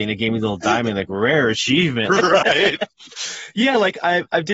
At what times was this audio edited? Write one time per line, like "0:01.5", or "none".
0:02.1